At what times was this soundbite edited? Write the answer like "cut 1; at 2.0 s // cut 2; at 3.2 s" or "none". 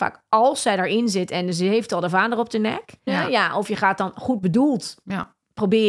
cut 1; at 3.1 s